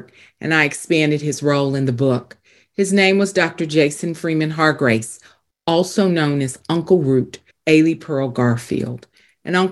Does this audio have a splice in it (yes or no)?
yes